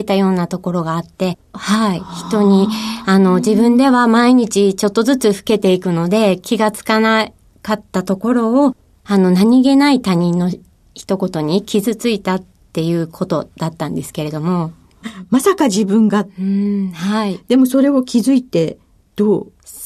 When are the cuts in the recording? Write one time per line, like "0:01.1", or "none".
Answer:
0:01.5
0:15.0